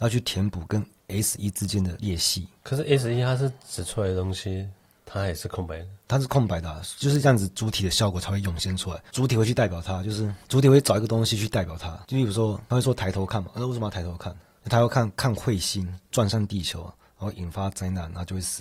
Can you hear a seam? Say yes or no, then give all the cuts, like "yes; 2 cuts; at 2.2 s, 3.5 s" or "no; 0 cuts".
no; 0 cuts